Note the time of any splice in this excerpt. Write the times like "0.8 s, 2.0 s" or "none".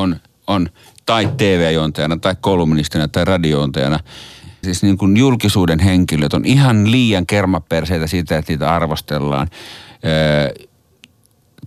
4.6 s